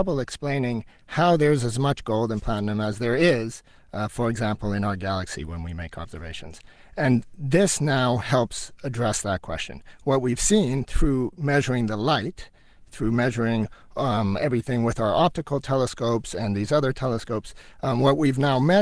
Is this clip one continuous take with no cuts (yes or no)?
yes